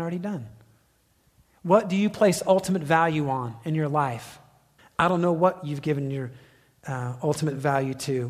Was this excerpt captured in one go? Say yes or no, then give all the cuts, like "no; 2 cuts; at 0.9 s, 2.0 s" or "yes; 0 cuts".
no; 1 cut; at 4.8 s